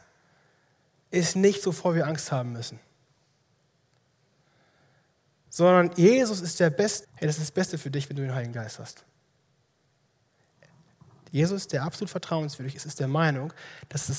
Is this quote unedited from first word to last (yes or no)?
no